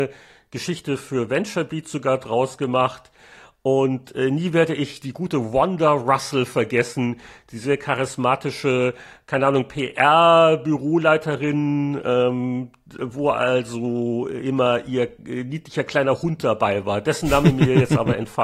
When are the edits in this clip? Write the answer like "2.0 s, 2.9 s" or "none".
none